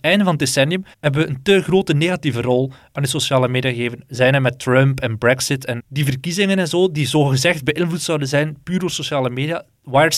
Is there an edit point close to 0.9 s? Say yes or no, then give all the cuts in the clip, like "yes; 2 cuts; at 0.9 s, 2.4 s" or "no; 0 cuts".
yes; 2 cuts; at 0.9 s, 5.8 s